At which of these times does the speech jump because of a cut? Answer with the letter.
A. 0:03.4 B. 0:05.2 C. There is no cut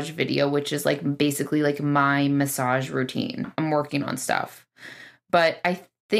A